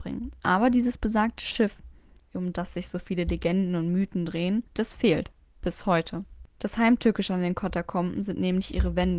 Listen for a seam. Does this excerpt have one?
yes; 2 cuts; at 4.7 s, 6.5 s

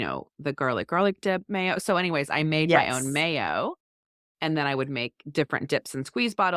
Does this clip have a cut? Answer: no; 0 cuts

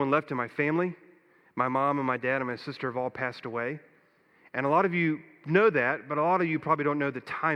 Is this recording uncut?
yes; 0 cuts

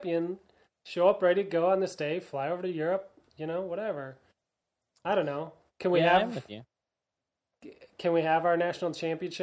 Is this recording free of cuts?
yes; 0 cuts

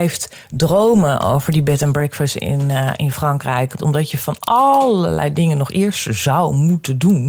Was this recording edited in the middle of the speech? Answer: yes; 1 cut; at 3.8 s

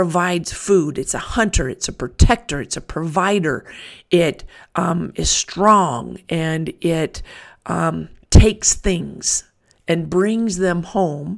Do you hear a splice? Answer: yes; 1 cut; at 8.2 s

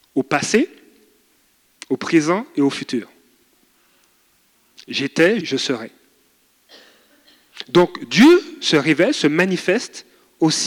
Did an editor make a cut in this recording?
yes; 1 cut; at 5.4 s

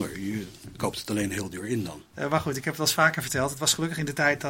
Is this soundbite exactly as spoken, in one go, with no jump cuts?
no; 1 cut; at 2.1 s

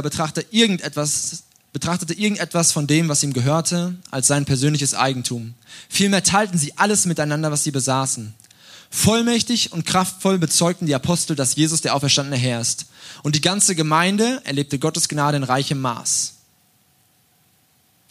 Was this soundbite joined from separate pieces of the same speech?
no; 0 cuts

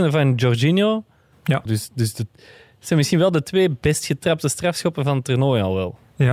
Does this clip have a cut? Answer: yes; 1 cut; at 1.7 s

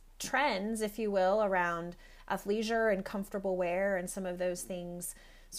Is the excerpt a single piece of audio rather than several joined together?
yes; 0 cuts

